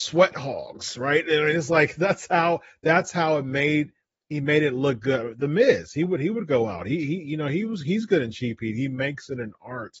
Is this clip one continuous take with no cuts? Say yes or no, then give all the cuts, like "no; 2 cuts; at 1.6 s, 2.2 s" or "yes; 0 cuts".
yes; 0 cuts